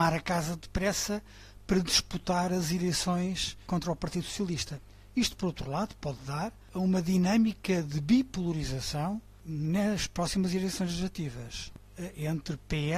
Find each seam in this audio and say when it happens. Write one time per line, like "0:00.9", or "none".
none